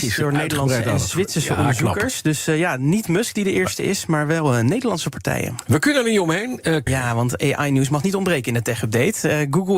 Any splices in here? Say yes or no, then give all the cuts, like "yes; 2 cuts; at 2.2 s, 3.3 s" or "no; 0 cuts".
yes; 1 cut; at 6.9 s